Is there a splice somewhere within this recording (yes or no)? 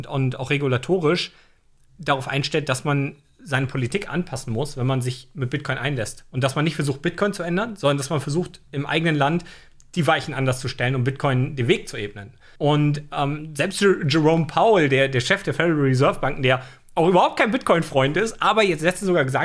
yes